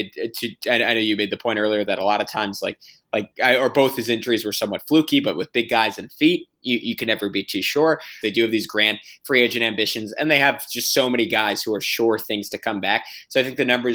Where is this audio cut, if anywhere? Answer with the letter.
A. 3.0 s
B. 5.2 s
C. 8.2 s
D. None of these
C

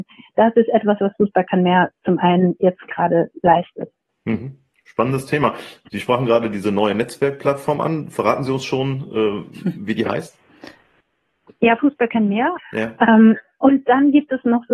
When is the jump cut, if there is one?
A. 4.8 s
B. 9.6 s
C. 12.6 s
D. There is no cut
C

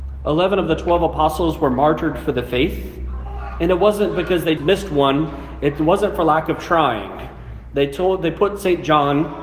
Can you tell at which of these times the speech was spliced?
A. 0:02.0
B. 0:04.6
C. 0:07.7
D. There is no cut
B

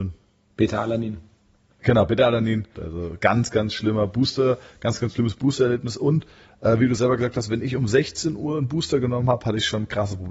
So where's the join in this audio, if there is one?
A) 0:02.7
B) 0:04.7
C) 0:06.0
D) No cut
A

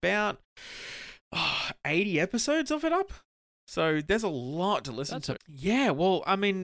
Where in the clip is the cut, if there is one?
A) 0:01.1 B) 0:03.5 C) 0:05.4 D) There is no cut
C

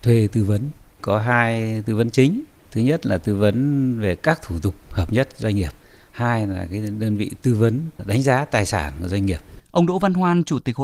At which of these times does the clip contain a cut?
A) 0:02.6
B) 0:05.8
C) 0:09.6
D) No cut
C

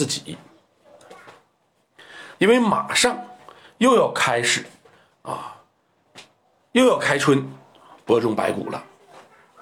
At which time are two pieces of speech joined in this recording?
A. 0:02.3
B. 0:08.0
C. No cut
A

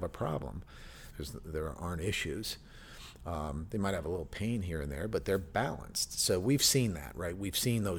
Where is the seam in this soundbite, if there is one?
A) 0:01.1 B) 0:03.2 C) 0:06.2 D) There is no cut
A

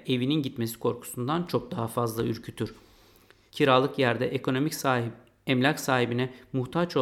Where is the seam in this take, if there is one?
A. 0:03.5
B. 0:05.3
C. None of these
A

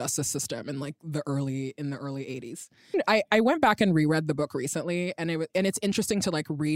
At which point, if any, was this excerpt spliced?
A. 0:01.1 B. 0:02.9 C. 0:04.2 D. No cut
B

